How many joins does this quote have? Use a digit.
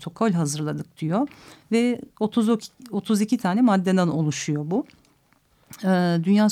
0